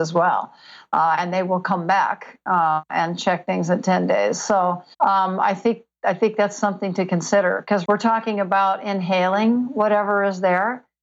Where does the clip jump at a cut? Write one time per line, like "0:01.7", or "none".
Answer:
0:04.9
0:07.8